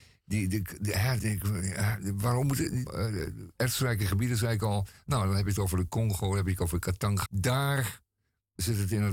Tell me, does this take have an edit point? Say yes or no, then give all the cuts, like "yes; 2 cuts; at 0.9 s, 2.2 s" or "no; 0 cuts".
yes; 3 cuts; at 1.2 s, 2.9 s, 7.3 s